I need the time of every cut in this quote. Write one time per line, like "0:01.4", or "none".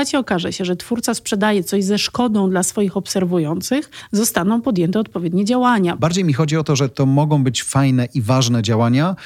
0:06.0

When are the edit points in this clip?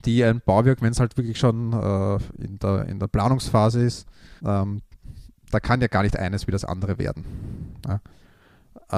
0:04.4

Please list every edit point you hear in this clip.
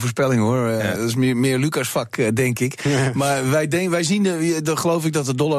none

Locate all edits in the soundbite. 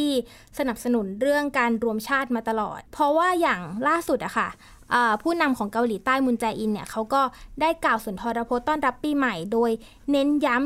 0:02.9

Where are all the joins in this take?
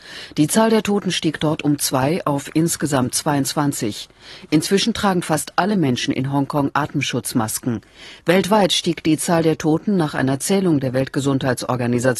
none

